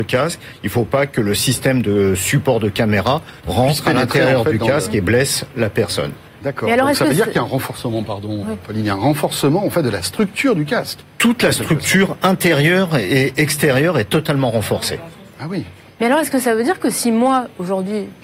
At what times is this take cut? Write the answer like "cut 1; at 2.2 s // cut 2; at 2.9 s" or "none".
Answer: cut 1; at 3.4 s